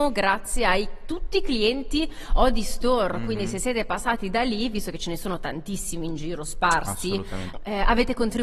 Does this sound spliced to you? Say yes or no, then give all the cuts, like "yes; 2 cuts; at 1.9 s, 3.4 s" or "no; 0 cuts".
yes; 1 cut; at 7.5 s